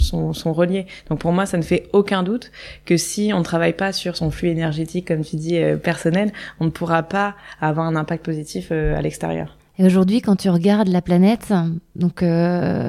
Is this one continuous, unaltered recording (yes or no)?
no